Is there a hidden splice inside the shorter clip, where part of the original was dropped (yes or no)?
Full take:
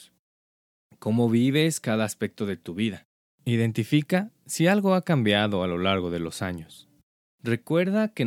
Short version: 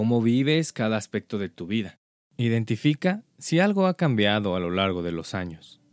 no